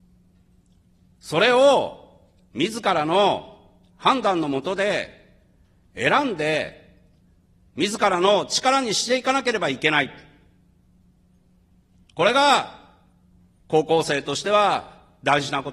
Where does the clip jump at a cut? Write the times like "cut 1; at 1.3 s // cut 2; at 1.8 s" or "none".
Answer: none